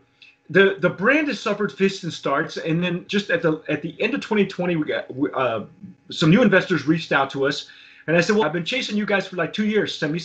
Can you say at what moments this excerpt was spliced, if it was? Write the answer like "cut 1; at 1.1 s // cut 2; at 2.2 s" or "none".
cut 1; at 3.1 s // cut 2; at 8.4 s